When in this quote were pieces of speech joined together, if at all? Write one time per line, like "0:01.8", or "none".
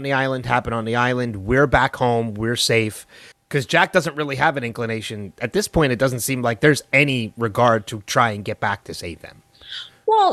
0:03.3